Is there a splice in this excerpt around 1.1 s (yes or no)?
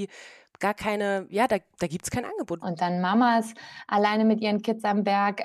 no